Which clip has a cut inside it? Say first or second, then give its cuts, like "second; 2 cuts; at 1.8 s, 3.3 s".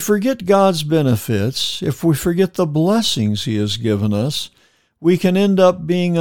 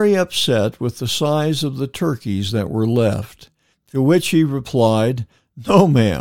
second; 1 cut; at 3.7 s